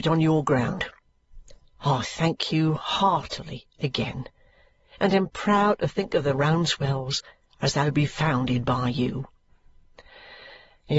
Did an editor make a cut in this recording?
no; 0 cuts

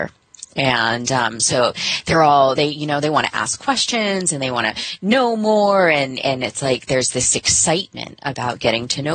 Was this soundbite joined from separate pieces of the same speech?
no; 0 cuts

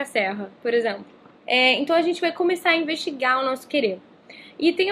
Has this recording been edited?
yes; 1 cut; at 1.4 s

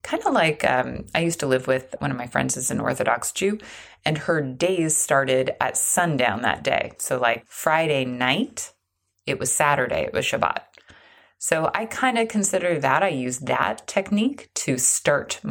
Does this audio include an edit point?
yes; 1 cut; at 9.2 s

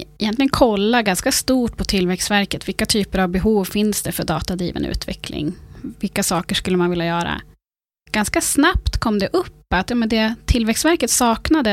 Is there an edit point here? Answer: no; 0 cuts

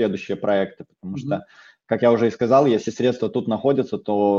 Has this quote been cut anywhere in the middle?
no; 0 cuts

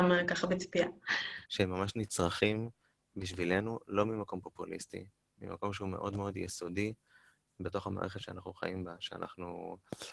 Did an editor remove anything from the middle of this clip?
yes; 1 cut; at 1.5 s

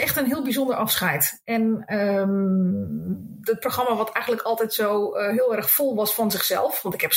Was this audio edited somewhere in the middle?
no; 0 cuts

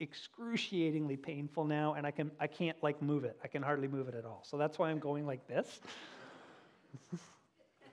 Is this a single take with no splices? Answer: yes; 0 cuts

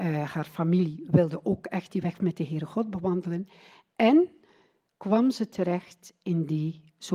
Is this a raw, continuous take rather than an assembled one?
yes; 0 cuts

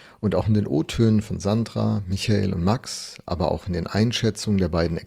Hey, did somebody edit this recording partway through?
no; 0 cuts

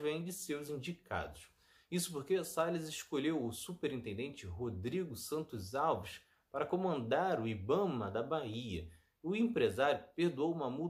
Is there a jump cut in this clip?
no; 0 cuts

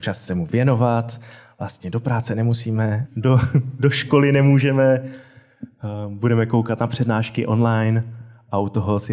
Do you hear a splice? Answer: yes; 1 cut; at 3.0 s

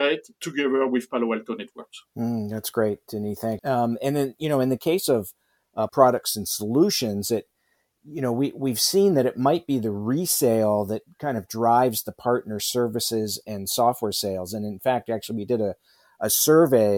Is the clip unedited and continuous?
no; 2 cuts; at 3.6 s, 5.9 s

